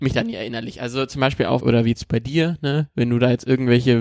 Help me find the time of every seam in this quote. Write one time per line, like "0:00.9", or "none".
0:01.6